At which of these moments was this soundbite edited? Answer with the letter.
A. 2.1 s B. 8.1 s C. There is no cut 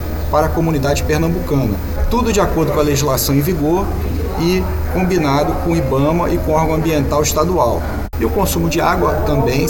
B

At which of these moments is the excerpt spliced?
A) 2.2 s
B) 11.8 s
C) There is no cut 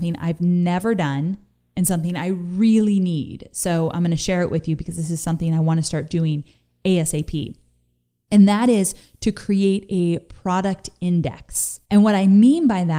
B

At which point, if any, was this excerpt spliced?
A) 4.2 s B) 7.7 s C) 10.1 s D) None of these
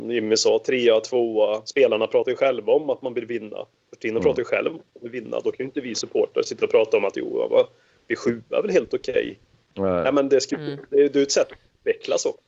D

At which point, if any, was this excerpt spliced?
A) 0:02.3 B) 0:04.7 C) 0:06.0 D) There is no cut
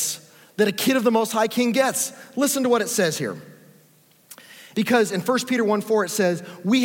B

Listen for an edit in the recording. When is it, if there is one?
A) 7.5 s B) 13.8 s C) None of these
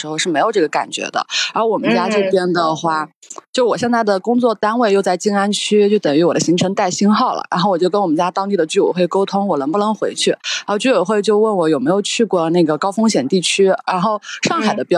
C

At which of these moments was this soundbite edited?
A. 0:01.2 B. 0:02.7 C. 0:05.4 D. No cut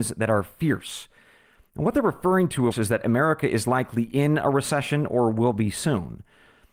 B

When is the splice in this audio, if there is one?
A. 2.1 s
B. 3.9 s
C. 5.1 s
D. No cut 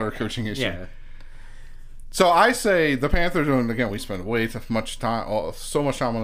D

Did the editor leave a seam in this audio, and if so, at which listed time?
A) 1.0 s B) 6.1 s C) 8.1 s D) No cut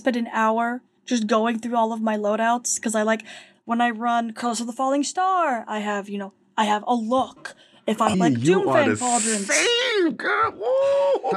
C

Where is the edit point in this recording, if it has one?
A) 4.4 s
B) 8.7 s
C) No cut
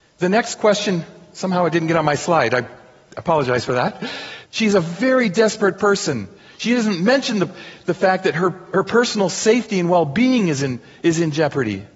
A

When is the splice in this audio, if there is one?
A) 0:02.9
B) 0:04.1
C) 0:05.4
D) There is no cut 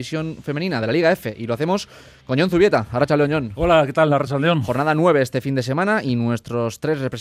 D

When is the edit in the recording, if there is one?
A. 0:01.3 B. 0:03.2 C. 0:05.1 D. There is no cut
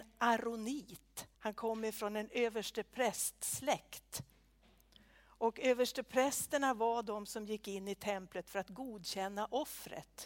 A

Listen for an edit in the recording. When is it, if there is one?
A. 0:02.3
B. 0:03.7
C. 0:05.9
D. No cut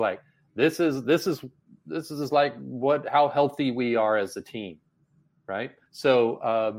C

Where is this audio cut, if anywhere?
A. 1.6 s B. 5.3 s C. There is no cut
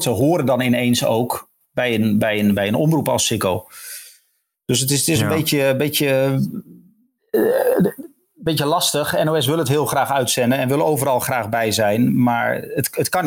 A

